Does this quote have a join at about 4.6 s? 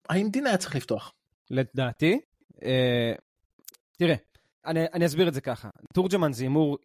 yes; 1 cut; at 4.6 s

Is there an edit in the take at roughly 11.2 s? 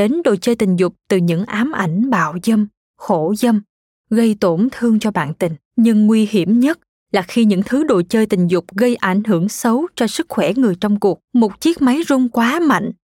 yes; 2 cuts; at 5.6 s, 11.2 s

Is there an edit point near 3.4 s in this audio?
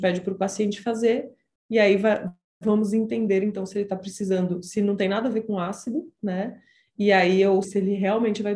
no; 2 cuts; at 6.2 s, 7.6 s

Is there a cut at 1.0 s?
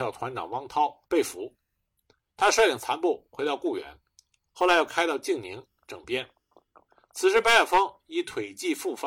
yes; 1 cut; at 1.0 s

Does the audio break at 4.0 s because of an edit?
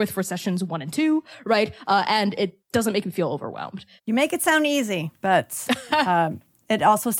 yes; 1 cut; at 4.0 s

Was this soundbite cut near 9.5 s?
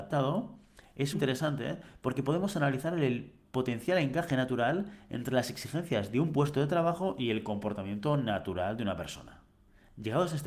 no; 1 cut; at 1.1 s

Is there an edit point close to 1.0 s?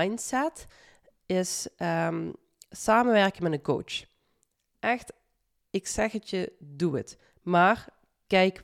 no; 0 cuts

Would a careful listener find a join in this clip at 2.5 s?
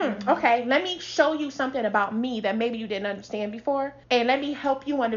no; 1 cut; at 4.0 s

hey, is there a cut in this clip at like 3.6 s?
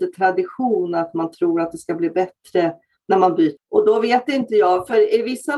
yes; 1 cut; at 3.6 s

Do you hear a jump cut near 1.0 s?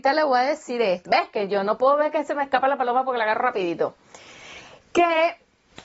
yes; 1 cut; at 1.0 s

